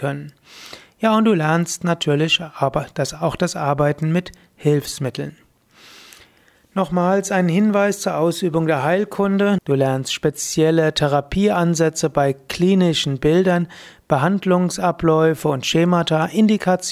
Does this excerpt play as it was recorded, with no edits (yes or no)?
no